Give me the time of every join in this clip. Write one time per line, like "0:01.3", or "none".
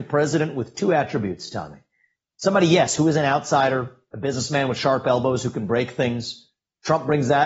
none